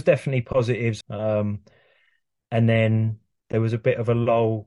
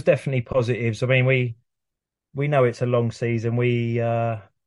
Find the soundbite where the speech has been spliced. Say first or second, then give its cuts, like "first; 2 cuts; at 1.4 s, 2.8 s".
first; 1 cut; at 1.0 s